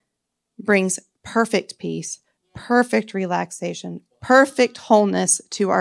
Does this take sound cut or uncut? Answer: cut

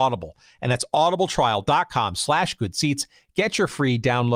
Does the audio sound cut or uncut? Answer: uncut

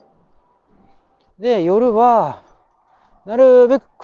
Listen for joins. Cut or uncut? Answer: cut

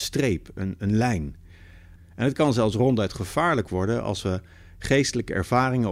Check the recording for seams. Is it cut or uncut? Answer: cut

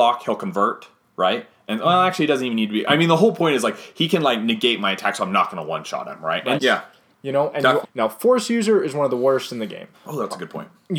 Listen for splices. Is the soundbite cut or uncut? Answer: cut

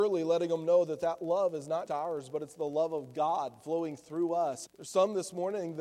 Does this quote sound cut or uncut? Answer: cut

